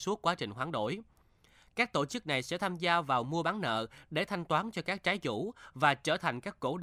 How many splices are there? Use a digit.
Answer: 0